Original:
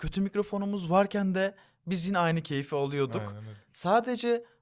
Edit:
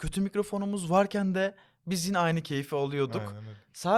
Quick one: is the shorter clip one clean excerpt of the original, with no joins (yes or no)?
yes